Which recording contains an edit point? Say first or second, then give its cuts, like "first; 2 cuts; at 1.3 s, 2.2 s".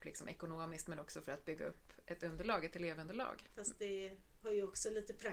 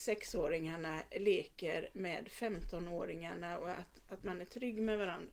first; 1 cut; at 3.5 s